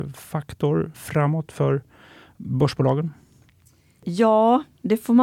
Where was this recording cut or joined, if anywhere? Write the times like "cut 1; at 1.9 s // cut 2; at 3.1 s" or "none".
cut 1; at 0.9 s